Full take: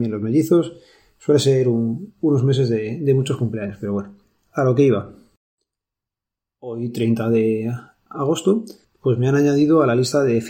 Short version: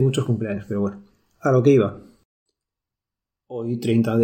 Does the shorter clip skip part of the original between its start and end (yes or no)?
no